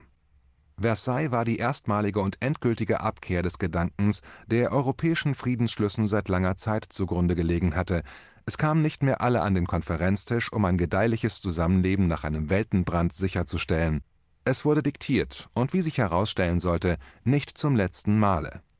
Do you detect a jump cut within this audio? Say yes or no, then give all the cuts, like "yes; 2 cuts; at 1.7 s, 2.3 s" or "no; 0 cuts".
no; 0 cuts